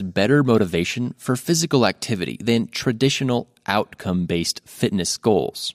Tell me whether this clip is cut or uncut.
uncut